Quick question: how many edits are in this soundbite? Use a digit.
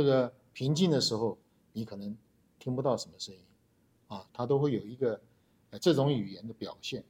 1